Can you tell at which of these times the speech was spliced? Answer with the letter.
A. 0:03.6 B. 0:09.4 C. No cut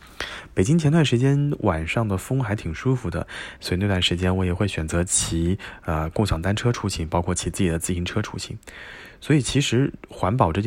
A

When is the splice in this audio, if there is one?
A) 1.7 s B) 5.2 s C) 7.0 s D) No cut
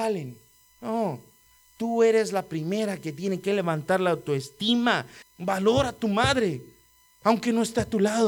B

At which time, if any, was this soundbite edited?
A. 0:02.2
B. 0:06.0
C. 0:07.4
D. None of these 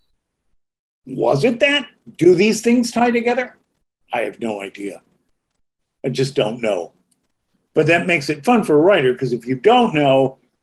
D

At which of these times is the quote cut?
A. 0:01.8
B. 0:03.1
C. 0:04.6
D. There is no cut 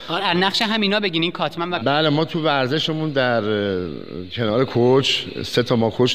A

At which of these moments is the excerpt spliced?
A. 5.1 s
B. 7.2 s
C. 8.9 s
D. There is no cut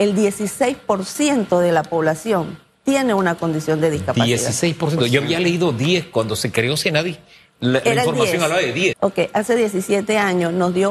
C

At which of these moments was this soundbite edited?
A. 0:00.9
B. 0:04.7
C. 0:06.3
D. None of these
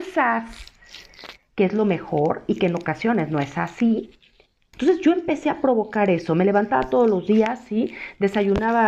B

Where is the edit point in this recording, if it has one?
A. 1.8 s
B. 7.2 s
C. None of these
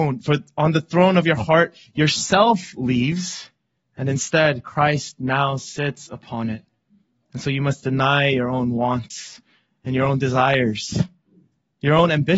B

